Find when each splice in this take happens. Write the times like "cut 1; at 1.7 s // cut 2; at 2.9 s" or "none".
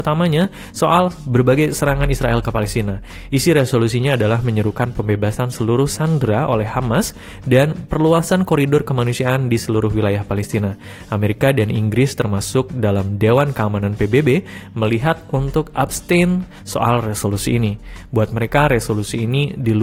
none